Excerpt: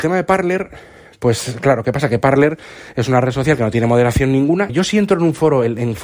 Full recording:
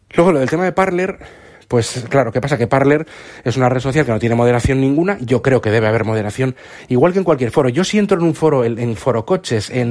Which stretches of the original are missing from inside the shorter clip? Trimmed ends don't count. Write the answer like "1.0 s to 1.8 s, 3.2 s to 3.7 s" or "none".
5.2 s to 7.7 s